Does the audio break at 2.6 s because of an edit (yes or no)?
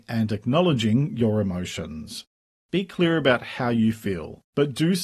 no